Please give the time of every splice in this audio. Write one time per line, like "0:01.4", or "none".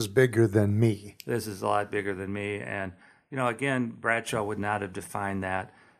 none